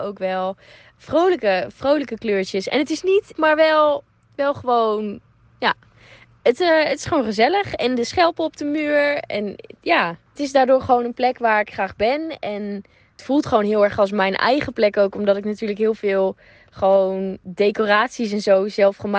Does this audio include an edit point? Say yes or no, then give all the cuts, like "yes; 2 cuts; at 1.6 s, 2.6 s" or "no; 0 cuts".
yes; 1 cut; at 3.3 s